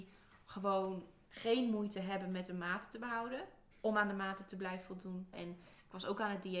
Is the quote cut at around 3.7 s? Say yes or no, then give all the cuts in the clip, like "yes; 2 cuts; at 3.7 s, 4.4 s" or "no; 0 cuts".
yes; 2 cuts; at 3.7 s, 5.3 s